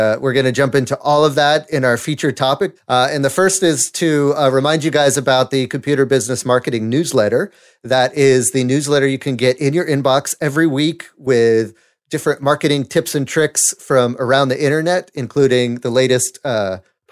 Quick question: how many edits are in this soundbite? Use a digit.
1